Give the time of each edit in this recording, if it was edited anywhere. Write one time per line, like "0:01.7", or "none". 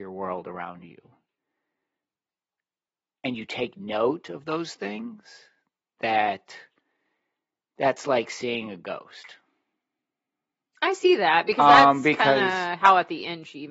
none